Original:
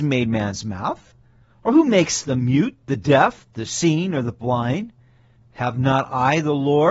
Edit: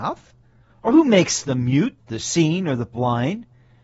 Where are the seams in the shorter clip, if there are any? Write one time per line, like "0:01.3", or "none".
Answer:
0:02.0

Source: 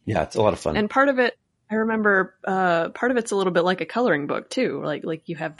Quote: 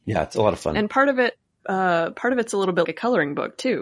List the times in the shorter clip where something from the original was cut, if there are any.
0:01.6
0:02.8

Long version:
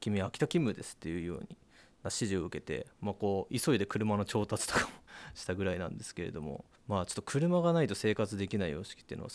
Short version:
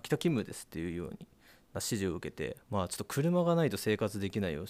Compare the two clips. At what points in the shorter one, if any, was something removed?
0:02.6

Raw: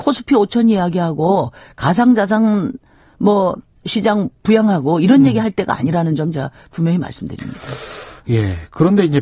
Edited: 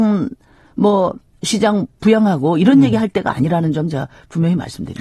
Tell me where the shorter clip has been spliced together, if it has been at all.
none

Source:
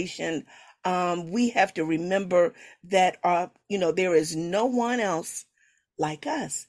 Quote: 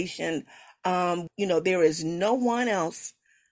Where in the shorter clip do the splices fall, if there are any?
0:01.3

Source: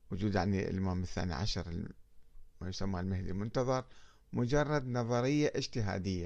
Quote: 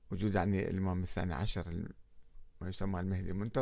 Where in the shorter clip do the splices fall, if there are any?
none

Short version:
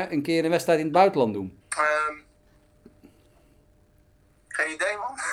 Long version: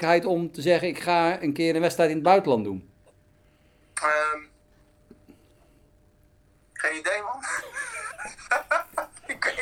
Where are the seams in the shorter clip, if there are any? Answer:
0:01.6

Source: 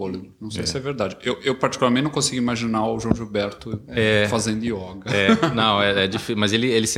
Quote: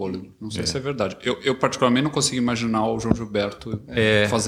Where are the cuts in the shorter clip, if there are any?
none

